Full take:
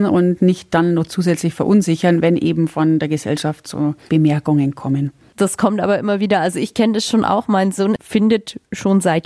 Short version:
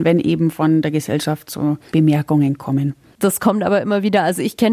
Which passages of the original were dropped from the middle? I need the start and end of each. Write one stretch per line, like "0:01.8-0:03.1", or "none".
none